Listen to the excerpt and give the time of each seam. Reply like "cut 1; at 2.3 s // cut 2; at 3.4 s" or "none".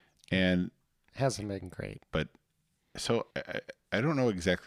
cut 1; at 2.1 s // cut 2; at 3.3 s